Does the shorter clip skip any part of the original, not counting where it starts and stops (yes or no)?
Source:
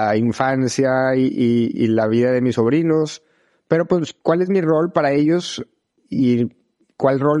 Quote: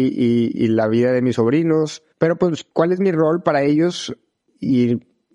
yes